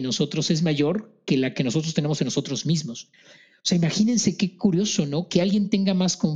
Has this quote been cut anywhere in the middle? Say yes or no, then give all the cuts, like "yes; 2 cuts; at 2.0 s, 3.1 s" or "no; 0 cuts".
no; 0 cuts